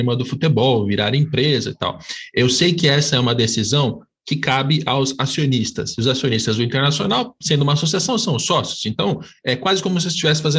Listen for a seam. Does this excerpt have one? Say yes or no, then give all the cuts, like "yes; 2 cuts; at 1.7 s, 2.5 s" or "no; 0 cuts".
no; 0 cuts